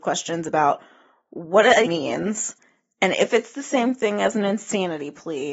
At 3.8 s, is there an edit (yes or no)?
no